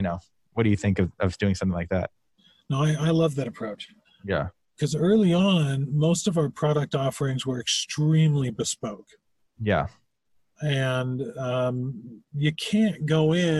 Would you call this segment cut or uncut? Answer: cut